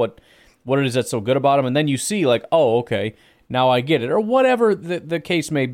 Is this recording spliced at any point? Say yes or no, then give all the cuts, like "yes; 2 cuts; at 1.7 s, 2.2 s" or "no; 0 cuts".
no; 0 cuts